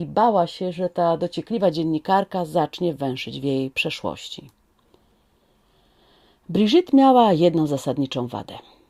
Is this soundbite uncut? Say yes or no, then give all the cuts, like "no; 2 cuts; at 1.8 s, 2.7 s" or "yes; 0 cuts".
yes; 0 cuts